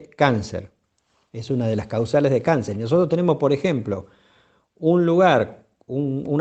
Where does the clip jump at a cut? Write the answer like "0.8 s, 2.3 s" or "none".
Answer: none